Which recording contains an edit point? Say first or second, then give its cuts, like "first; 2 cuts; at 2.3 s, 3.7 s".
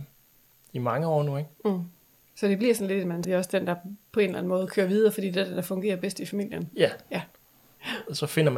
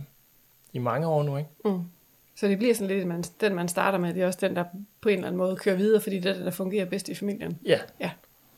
first; 1 cut; at 3.2 s